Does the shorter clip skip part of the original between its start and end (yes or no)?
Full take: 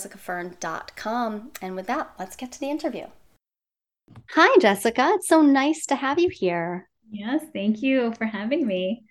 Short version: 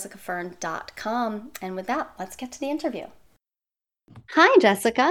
no